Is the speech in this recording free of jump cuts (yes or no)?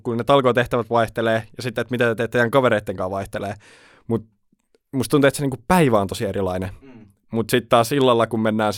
yes